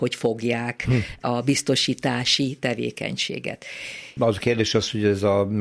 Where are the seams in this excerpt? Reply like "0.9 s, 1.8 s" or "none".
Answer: 4.2 s